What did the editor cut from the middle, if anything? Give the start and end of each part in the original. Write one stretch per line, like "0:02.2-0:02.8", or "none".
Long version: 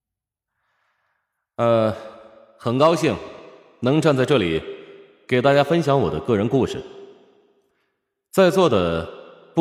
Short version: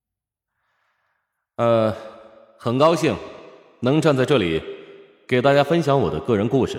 none